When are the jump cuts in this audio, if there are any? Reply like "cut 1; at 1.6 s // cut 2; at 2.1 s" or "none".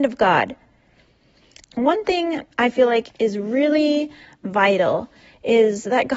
cut 1; at 1.6 s // cut 2; at 3.1 s